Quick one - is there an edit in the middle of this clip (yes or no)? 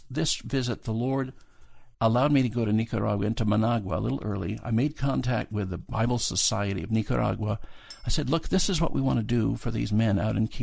yes